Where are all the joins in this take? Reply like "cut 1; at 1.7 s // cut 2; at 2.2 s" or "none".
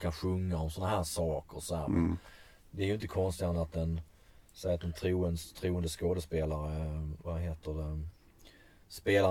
none